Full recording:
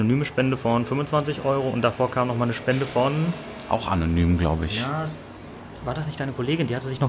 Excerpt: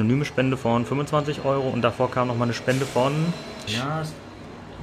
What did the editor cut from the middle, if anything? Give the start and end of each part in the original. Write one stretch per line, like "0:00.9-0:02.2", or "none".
0:03.7-0:04.7